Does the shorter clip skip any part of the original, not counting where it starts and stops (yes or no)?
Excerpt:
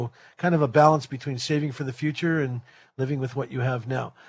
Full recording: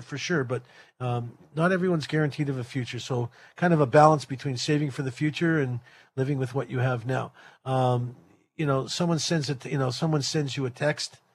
no